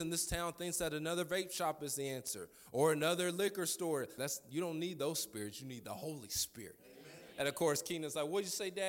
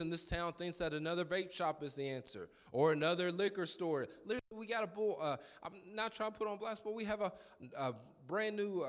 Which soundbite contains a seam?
first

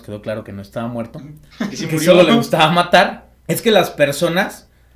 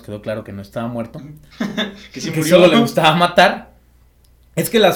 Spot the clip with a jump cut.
first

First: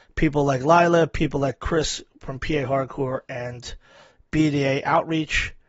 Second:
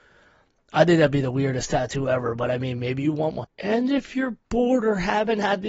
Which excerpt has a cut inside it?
second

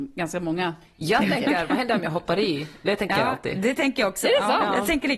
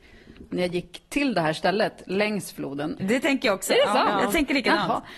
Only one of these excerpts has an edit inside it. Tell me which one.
second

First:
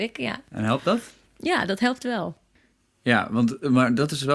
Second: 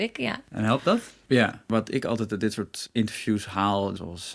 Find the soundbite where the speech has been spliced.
second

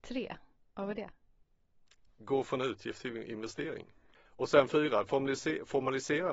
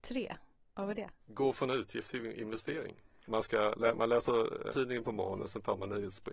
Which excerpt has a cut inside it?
second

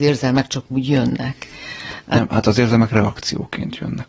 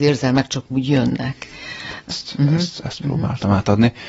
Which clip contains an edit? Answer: second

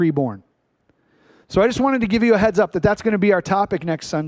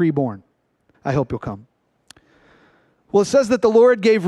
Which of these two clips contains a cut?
second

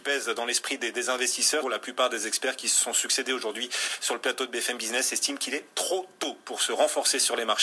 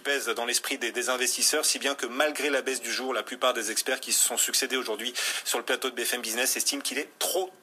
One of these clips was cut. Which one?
first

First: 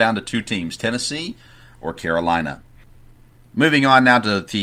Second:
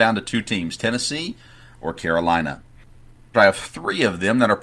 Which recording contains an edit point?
second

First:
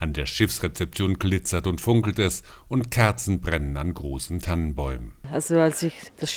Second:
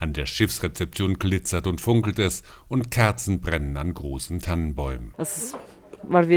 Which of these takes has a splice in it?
second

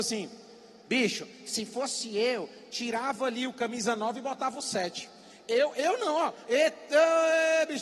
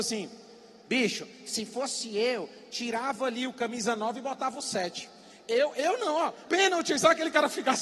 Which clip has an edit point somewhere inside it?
second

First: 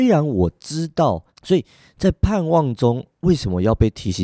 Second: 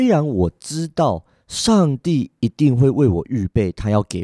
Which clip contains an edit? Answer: first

